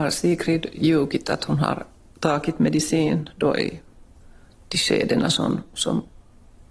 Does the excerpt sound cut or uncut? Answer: uncut